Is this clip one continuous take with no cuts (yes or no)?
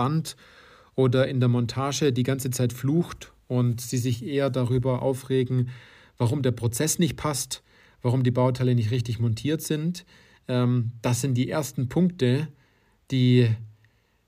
yes